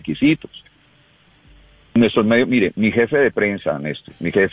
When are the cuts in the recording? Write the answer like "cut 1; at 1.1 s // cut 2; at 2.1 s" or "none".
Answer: none